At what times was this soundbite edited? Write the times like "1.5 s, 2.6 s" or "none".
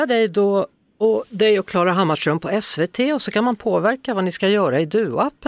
none